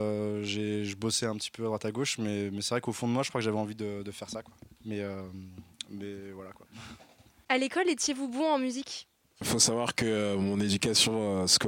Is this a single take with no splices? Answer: no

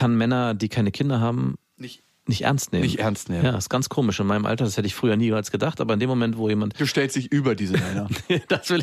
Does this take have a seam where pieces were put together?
no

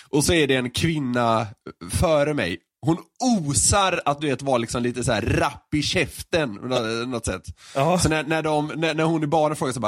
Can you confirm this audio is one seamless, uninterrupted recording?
yes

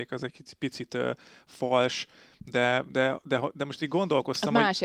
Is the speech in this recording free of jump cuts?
yes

